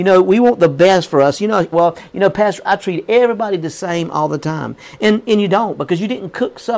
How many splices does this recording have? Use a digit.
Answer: 1